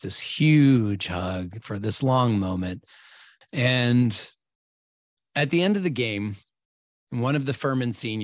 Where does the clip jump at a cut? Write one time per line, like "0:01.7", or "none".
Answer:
0:03.4